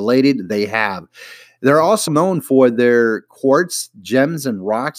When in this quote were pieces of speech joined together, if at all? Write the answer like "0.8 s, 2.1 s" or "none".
2.1 s